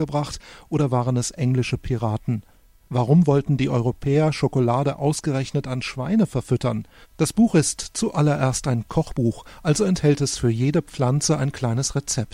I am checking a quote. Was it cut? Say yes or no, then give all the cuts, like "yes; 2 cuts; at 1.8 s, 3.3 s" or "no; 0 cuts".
yes; 1 cut; at 7.0 s